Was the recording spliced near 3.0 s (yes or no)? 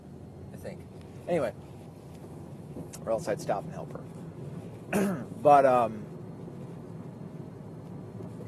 yes